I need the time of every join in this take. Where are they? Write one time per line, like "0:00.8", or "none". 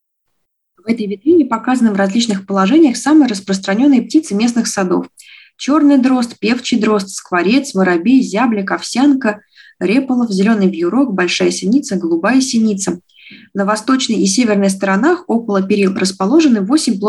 none